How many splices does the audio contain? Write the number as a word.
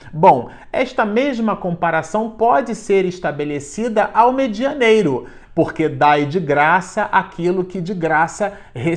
one